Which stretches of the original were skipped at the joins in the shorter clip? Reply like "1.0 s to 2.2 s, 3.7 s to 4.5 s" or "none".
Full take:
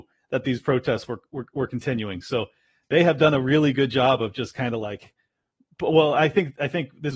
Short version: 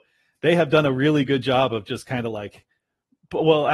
none

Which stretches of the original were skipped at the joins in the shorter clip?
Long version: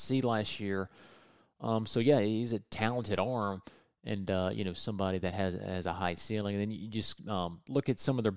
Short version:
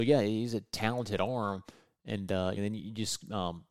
4.5 s to 6.5 s

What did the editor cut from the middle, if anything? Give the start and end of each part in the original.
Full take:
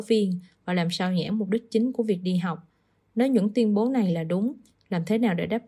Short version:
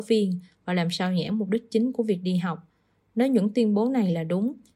none

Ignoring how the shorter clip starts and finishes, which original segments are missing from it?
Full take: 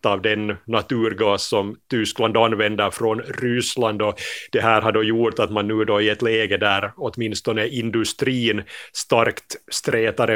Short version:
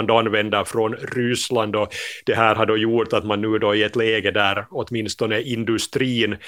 none

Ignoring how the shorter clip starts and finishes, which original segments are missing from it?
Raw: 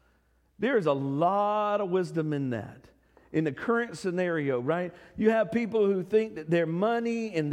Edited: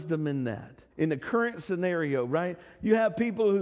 3.0 s to 3.3 s

